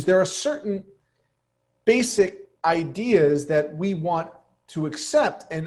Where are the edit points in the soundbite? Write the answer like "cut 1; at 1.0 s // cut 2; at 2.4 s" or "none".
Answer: cut 1; at 2.6 s